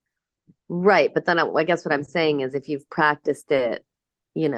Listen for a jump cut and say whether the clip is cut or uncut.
uncut